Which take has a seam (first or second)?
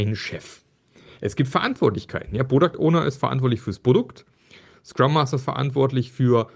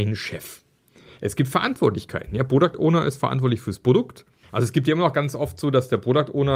second